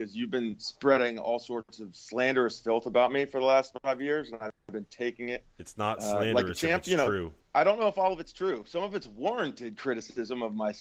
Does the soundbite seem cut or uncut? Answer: uncut